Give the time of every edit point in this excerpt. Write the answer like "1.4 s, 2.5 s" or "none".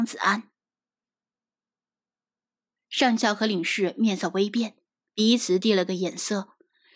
2.8 s